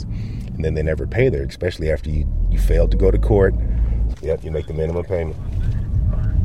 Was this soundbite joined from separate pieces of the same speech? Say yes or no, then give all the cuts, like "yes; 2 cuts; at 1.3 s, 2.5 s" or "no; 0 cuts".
yes; 2 cuts; at 1.5 s, 4.1 s